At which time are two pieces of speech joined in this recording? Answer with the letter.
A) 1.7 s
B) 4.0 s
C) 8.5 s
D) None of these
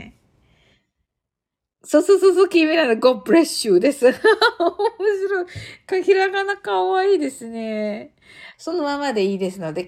C